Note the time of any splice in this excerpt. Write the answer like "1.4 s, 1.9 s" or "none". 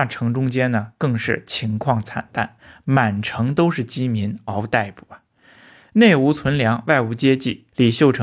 4.5 s